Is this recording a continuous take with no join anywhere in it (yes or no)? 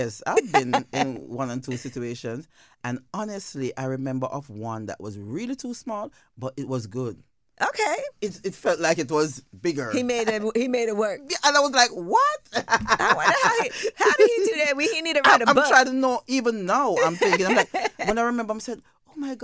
yes